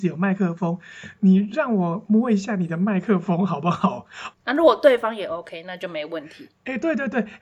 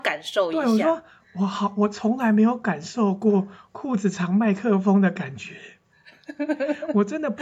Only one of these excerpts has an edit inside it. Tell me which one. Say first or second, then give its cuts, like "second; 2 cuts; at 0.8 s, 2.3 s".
first; 1 cut; at 4.3 s